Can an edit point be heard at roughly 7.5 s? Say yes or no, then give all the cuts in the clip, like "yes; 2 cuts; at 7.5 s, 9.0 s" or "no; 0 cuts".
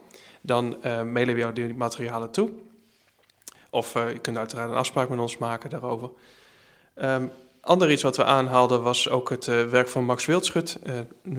no; 0 cuts